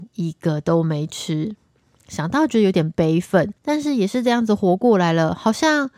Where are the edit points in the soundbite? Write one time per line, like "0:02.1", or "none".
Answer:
0:03.6